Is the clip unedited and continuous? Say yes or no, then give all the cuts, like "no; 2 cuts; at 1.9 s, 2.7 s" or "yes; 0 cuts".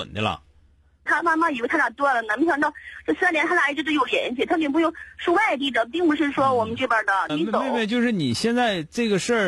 no; 2 cuts; at 1.1 s, 7.3 s